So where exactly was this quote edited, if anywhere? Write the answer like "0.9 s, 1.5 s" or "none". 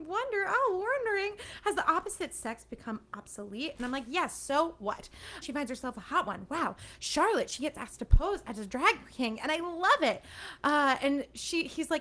5.4 s

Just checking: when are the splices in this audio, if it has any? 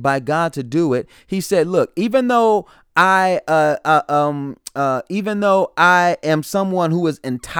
none

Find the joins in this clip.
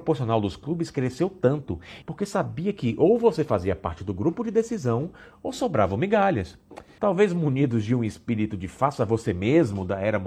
2.0 s, 7.0 s

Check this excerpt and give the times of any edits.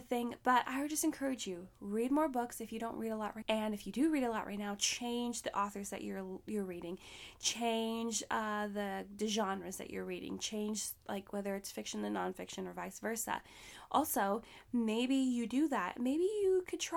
3.4 s

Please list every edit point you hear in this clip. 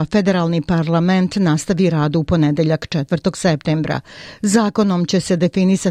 none

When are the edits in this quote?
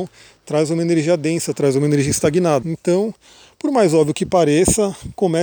2.6 s

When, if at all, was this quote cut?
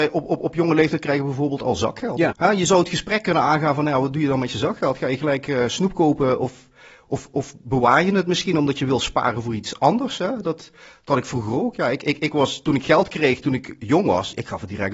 2.3 s

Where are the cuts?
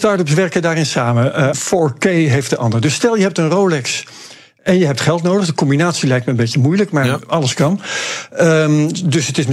1.5 s

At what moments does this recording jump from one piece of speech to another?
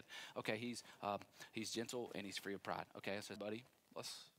3.4 s

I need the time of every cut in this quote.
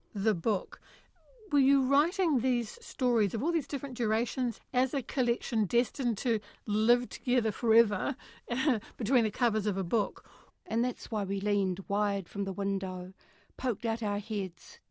4.6 s, 10.5 s

